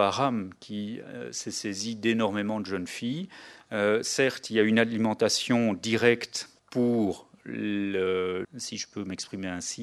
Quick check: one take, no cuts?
no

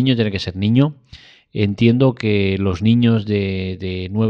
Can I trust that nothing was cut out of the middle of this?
yes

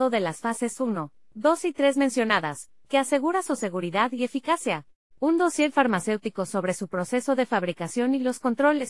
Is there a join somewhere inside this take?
yes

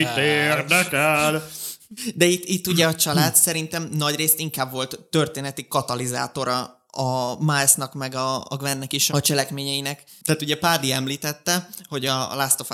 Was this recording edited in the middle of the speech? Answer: yes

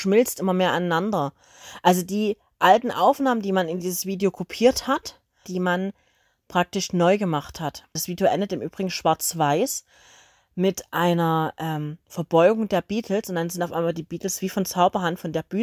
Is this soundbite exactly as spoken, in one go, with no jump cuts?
no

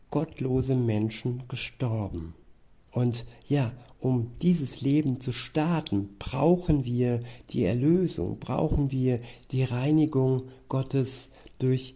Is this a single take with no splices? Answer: no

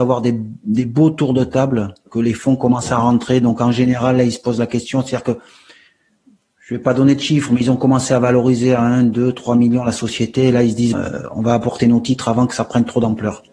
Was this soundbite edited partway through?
yes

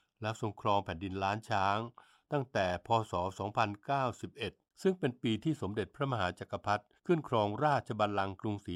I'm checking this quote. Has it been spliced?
yes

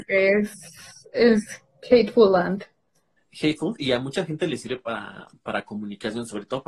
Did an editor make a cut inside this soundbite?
no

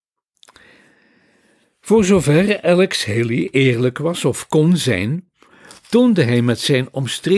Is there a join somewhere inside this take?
no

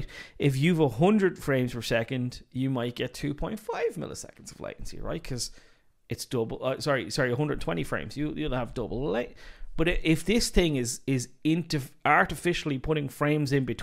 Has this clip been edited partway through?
no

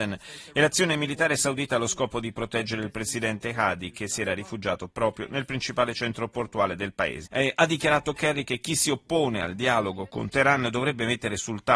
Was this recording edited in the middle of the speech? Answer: yes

